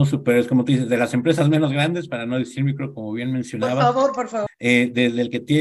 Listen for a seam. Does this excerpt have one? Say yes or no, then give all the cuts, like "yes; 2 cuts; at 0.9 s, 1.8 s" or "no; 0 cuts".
yes; 1 cut; at 4.5 s